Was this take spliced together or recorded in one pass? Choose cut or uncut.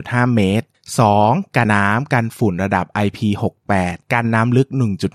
cut